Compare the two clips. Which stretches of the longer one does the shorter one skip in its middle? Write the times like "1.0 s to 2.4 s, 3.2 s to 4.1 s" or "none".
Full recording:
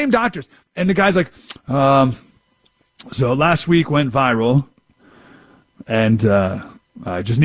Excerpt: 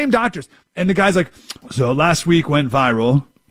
1.6 s to 3.0 s

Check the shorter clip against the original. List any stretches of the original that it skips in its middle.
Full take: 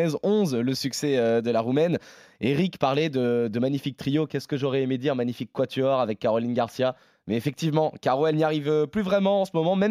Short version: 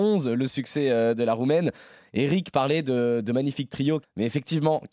4.3 s to 7.1 s

